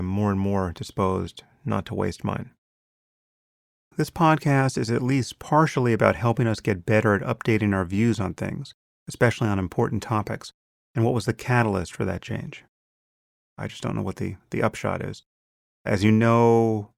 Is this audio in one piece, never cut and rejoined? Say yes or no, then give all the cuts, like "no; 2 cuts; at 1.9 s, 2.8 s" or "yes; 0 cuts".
no; 3 cuts; at 3.9 s, 10.8 s, 13.4 s